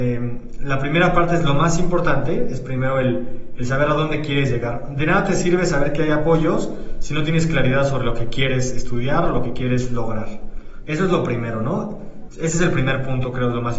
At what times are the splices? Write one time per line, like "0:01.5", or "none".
0:10.8
0:12.3